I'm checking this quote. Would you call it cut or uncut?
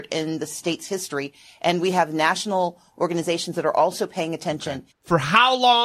cut